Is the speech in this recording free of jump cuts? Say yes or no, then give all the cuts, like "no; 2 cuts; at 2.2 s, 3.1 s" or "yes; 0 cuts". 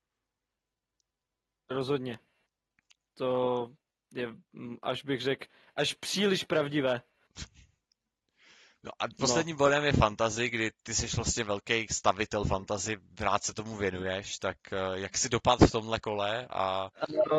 yes; 0 cuts